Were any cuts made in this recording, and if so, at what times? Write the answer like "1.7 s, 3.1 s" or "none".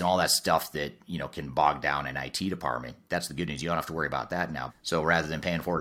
4.7 s

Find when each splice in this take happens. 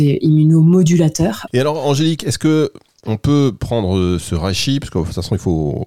1.5 s, 4.2 s

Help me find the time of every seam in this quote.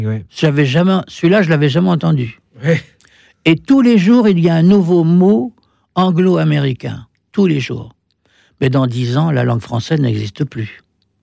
none

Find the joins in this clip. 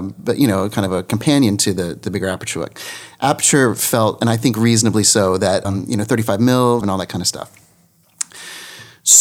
5.6 s, 6.8 s

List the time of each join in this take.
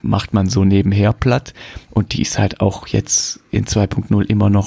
1.9 s

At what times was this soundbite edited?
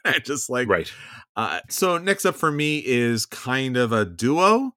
1.7 s

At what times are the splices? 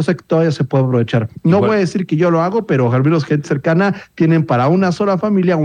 3.4 s

